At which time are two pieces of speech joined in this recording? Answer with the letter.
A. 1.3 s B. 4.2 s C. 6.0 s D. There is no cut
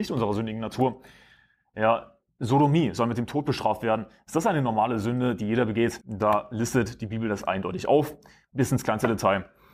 C